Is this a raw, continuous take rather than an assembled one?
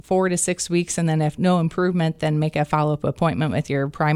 yes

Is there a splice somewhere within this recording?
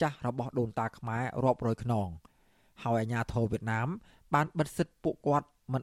no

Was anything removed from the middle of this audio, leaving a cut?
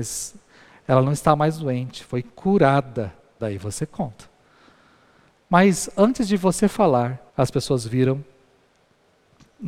yes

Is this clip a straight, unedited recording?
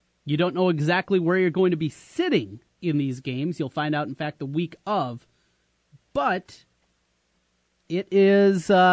yes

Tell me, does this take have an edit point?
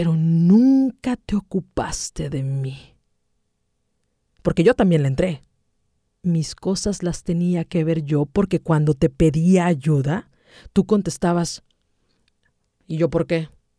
yes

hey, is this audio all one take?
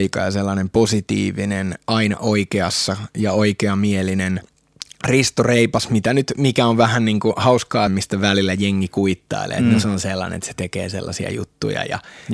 no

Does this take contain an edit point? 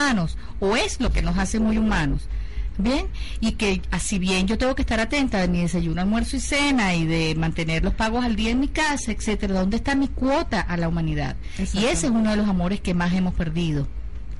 no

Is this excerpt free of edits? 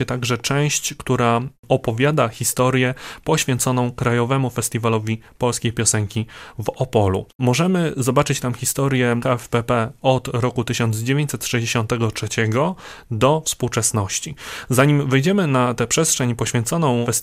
yes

